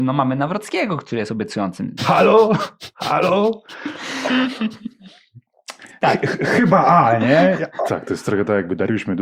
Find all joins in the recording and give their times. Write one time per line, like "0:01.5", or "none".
0:02.0
0:04.3
0:07.9